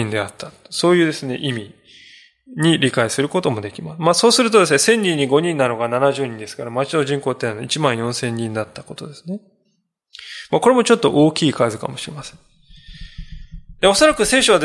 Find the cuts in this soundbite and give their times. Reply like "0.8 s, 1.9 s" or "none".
none